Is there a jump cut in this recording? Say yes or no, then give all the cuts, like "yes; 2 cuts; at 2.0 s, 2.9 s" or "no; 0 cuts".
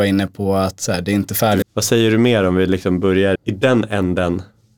yes; 2 cuts; at 1.6 s, 3.4 s